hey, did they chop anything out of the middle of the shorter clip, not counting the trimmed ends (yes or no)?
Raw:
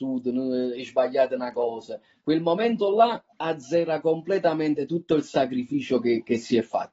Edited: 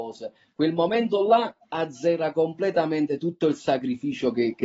no